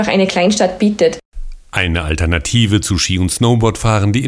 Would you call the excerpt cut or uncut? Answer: uncut